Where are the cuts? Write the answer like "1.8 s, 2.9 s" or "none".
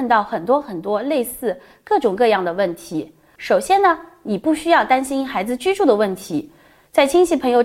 3.4 s